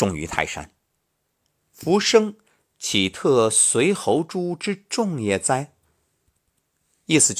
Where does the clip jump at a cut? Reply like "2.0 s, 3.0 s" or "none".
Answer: 1.6 s